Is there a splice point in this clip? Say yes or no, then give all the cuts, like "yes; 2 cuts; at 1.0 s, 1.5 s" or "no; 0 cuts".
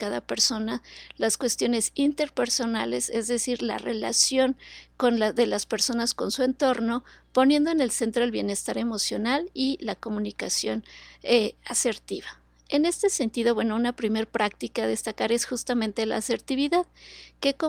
no; 0 cuts